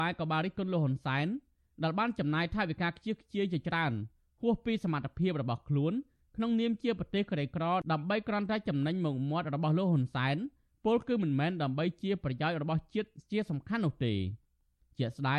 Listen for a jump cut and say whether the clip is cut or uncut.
uncut